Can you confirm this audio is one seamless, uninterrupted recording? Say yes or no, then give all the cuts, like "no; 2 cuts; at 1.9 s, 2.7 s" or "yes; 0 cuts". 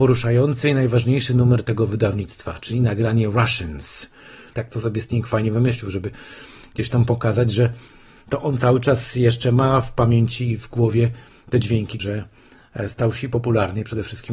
no; 2 cuts; at 4.5 s, 12.0 s